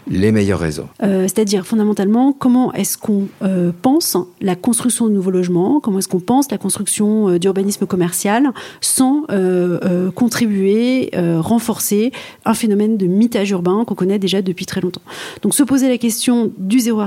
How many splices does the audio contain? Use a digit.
1